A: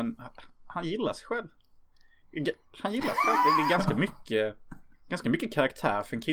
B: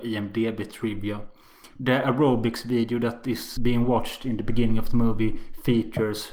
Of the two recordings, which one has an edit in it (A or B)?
B